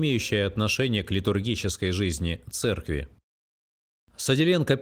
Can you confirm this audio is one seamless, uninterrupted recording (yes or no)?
yes